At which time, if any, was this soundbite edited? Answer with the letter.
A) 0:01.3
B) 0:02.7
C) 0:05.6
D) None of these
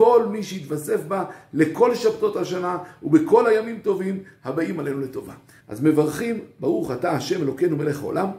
C